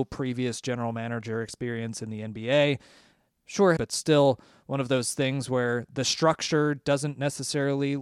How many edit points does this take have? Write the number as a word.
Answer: one